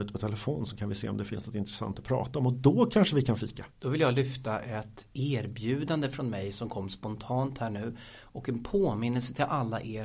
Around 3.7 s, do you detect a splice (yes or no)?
yes